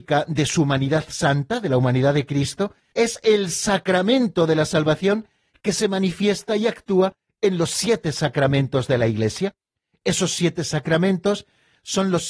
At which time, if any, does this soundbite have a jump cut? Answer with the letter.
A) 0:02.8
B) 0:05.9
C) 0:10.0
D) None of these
A